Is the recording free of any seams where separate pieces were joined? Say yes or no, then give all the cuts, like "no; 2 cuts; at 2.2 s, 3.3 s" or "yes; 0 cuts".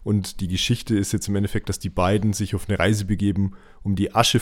yes; 0 cuts